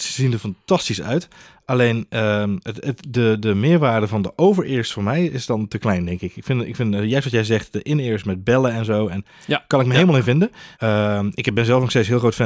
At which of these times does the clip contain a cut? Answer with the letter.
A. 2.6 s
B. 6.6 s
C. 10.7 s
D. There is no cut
C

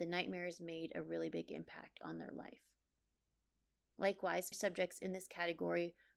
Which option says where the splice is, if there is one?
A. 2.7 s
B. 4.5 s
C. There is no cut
B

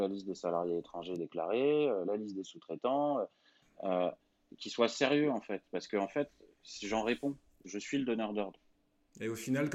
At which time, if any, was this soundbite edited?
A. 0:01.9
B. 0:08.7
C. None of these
C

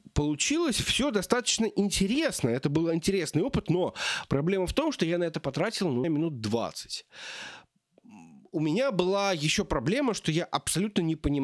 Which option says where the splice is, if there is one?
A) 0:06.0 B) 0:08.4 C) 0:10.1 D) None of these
A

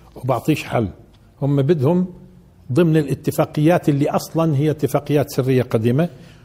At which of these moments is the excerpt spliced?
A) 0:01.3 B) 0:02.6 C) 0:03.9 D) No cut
D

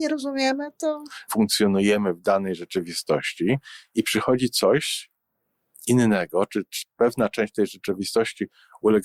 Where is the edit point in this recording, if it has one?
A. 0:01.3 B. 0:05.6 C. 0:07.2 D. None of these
A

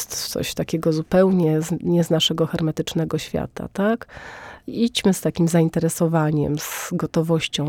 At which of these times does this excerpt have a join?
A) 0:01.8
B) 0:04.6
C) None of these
C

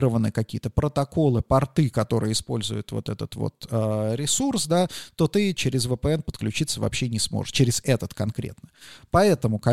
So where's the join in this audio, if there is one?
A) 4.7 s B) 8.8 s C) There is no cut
C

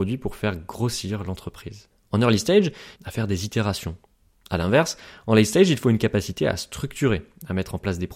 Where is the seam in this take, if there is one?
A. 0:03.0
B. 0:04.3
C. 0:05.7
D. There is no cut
A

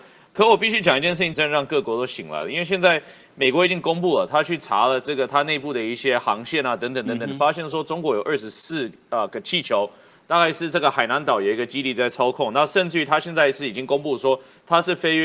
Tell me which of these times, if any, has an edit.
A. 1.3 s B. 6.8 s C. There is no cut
A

